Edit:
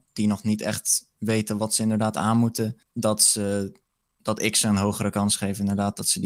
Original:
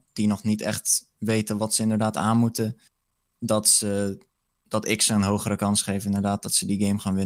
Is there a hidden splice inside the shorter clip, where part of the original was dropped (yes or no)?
yes